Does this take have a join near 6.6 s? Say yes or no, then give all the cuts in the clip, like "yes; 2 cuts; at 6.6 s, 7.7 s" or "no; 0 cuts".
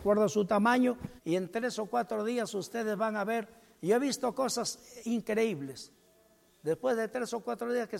no; 1 cut; at 1.2 s